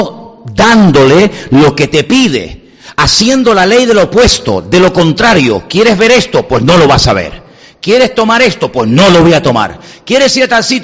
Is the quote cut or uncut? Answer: uncut